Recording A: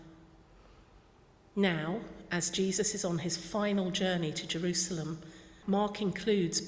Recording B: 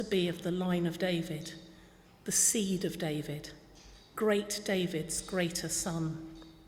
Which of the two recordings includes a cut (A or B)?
A